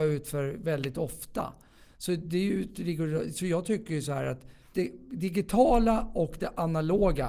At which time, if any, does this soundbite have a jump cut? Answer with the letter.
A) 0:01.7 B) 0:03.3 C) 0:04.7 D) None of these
C